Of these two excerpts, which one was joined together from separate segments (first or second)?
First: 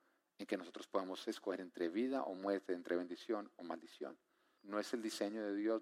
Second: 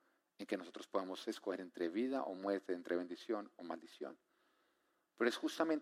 first